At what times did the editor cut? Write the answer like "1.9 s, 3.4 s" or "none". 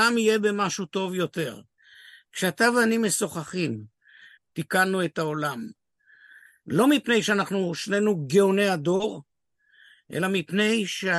4.3 s